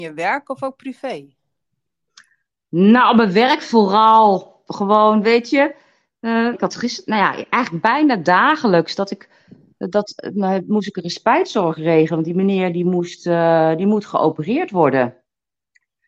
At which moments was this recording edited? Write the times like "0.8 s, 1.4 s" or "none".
6.5 s